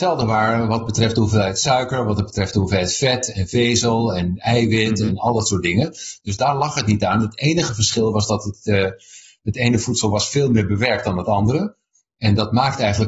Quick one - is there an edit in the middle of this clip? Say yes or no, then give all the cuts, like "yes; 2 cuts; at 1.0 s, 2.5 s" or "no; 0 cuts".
no; 0 cuts